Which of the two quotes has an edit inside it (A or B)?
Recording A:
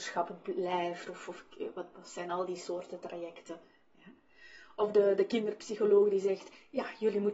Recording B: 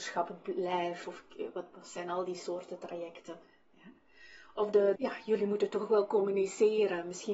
B